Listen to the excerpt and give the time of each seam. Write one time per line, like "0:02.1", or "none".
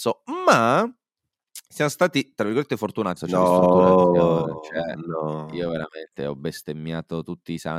0:03.2